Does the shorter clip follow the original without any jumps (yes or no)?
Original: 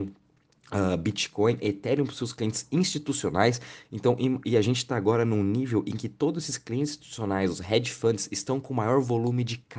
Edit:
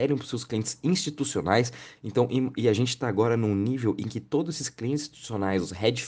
yes